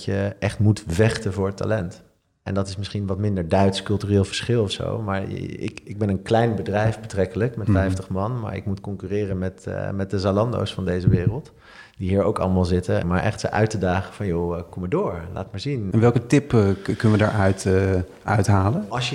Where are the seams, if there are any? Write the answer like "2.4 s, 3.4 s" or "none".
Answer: 13.0 s, 15.9 s